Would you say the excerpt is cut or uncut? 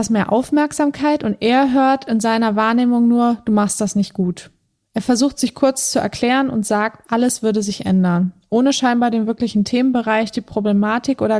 uncut